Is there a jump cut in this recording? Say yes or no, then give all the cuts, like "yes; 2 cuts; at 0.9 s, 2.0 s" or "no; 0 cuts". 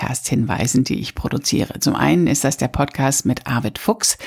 no; 0 cuts